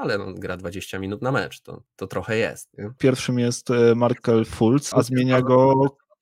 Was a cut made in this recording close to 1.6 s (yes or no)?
no